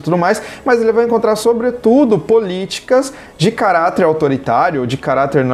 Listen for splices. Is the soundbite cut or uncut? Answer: uncut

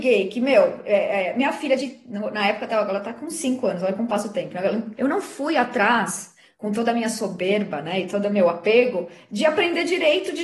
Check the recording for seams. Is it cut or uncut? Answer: cut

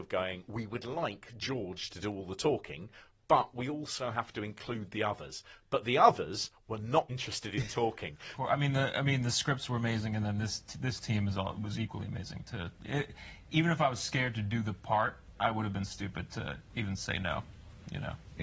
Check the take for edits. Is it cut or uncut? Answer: cut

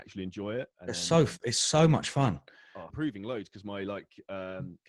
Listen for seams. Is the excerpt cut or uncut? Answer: cut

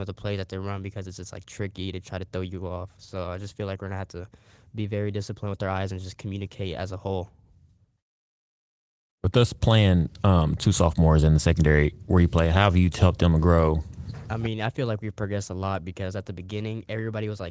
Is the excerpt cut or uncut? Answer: cut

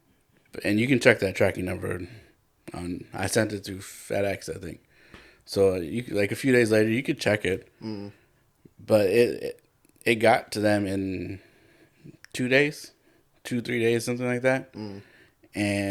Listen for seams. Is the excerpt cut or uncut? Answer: uncut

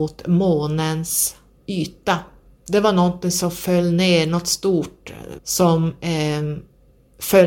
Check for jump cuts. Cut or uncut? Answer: cut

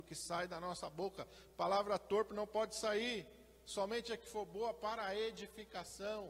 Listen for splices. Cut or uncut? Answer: uncut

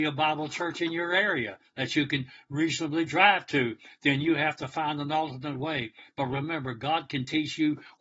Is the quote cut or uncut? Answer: uncut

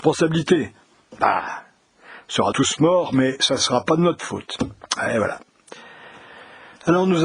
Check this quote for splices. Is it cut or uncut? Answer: cut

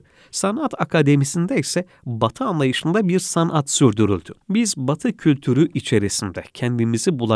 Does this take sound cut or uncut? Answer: cut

